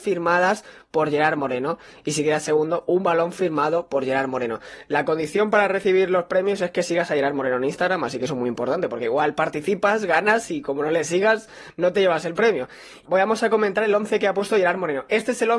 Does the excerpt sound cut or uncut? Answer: cut